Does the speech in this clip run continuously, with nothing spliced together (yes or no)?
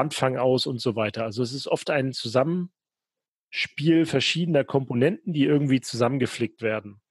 yes